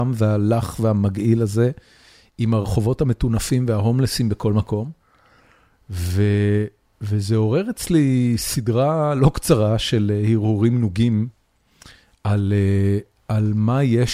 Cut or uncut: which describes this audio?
uncut